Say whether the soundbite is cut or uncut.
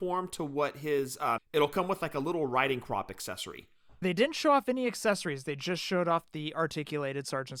cut